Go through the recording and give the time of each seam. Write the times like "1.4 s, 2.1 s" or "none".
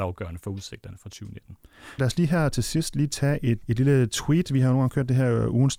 2.0 s, 3.6 s